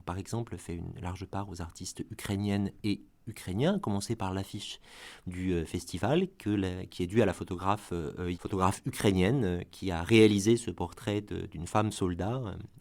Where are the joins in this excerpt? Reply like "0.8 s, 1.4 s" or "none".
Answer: 8.3 s